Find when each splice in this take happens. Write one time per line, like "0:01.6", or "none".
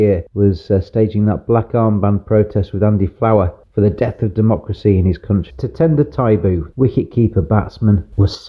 0:05.5
0:06.7